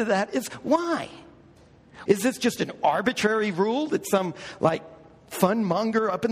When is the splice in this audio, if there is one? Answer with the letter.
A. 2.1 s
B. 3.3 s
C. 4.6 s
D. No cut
A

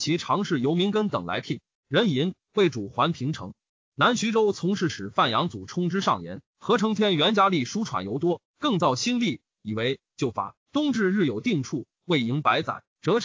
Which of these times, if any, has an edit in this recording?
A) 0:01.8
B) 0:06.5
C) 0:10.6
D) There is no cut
A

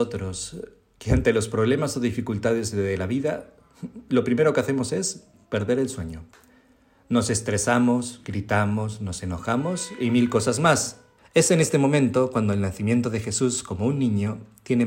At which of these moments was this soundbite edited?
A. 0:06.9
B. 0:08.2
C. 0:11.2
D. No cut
C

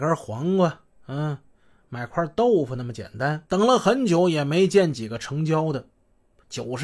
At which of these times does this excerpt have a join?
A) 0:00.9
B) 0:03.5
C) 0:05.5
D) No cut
B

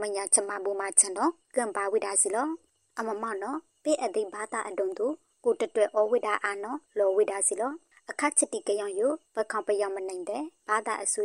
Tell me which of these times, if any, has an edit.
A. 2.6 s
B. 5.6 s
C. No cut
C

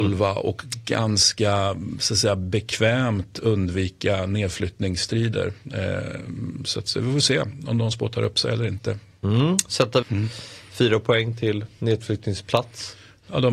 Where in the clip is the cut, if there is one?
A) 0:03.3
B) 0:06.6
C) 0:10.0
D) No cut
C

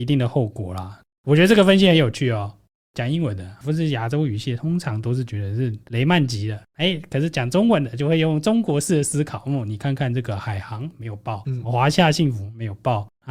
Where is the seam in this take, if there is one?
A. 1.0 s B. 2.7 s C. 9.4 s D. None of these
D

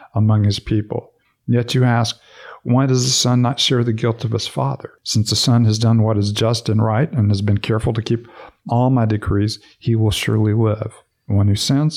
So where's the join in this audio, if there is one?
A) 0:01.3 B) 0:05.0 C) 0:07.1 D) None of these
B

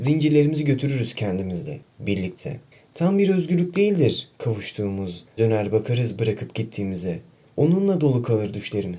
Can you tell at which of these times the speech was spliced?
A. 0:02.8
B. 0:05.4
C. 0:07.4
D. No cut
B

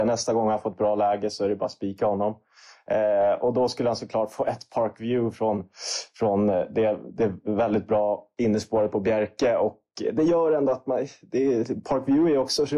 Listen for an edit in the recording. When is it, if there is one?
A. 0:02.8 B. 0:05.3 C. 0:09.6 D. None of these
D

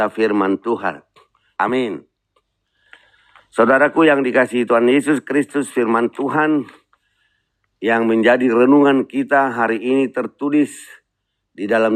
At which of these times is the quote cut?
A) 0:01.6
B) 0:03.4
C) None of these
A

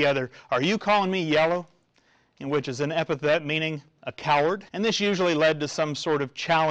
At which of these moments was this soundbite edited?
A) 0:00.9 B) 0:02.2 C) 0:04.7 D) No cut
C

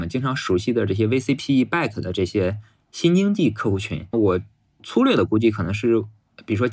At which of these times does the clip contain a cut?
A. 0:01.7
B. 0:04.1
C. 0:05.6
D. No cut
B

